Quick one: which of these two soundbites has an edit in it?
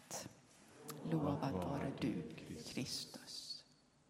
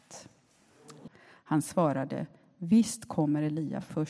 second; 1 cut; at 1.1 s

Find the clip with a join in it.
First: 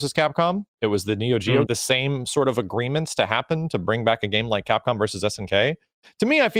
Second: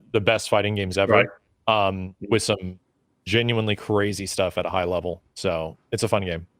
first; 1 cut; at 1.7 s

